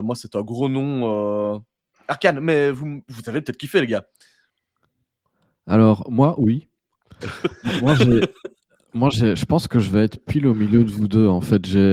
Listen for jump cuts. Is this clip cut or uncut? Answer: cut